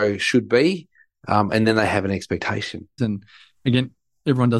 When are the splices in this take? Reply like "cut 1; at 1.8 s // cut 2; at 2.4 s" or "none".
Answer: cut 1; at 3.0 s